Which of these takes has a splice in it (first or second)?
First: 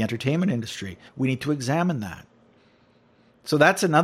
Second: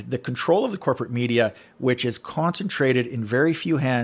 first